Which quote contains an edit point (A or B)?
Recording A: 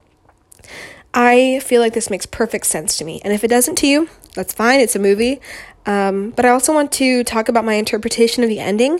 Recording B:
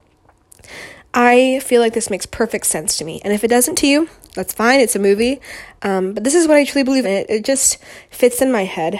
B